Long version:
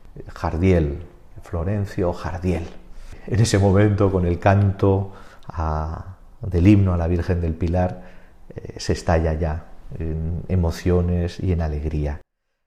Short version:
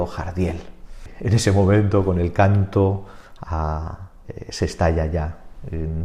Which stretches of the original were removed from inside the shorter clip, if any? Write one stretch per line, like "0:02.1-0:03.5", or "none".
0:06.3-0:08.5